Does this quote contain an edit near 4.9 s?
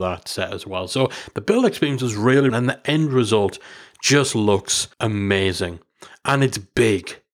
yes; 2 cuts; at 2.5 s, 4.9 s

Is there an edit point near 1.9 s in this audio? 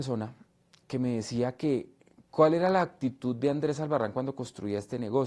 no; 0 cuts

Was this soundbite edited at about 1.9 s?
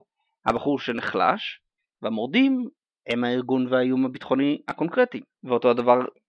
no; 1 cut; at 5.3 s

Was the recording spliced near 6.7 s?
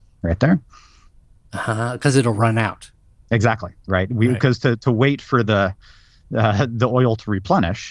no; 0 cuts

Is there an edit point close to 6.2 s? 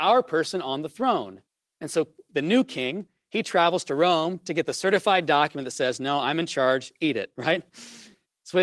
no; 1 cut; at 2.3 s

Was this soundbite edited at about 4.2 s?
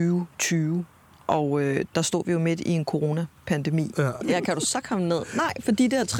yes; 1 cut; at 4.2 s

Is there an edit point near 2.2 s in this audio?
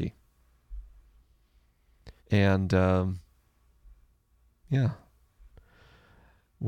yes; 1 cut; at 2.2 s

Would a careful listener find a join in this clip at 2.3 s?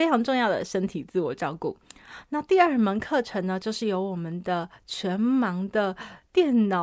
no; 0 cuts

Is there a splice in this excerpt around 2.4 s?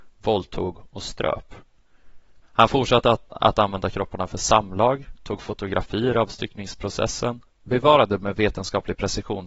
yes; 1 cut; at 2.4 s

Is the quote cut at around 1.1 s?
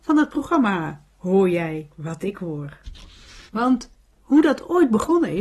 no; 1 cut; at 3.5 s

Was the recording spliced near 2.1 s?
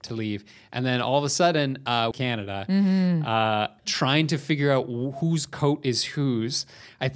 yes; 2 cuts; at 2.1 s, 3.8 s

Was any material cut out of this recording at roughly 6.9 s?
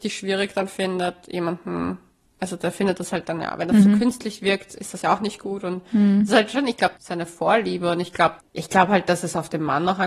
yes; 2 cuts; at 6.9 s, 8.4 s

